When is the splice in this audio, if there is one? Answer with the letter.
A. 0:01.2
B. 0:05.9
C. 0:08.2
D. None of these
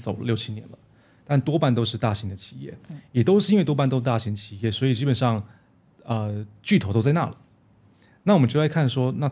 D